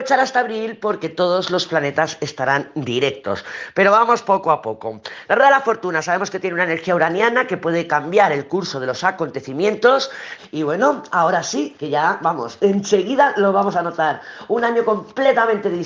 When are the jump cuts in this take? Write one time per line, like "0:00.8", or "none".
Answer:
0:10.4
0:11.7

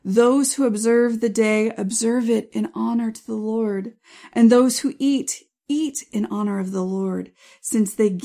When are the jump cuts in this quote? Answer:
none

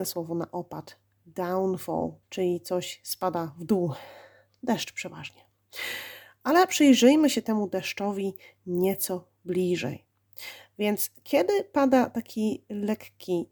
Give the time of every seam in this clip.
0:02.2

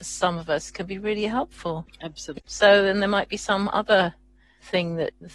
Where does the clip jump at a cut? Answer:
0:02.4

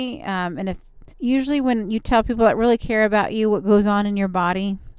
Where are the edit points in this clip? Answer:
0:01.1

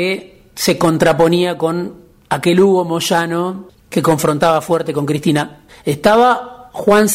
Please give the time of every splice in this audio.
0:05.7

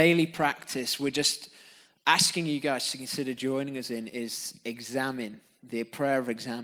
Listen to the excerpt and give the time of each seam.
none

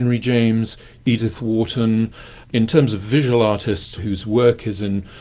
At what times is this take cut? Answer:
0:02.4
0:04.0

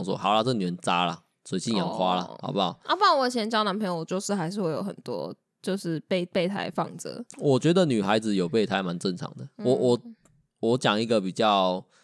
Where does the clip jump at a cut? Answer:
none

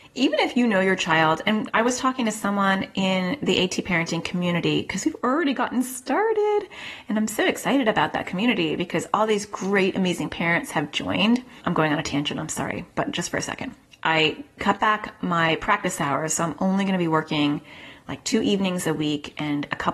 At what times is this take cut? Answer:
0:11.6

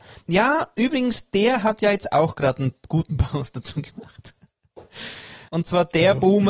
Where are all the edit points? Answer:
0:05.5

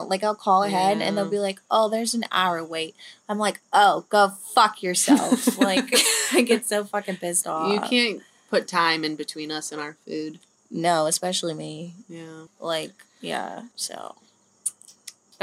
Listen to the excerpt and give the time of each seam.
0:12.5
0:13.7

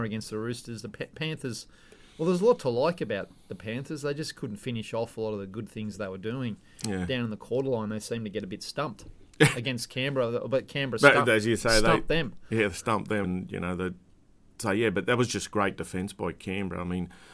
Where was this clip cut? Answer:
0:13.2

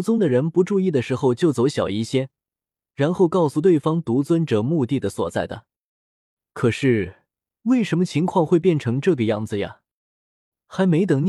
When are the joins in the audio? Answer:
none

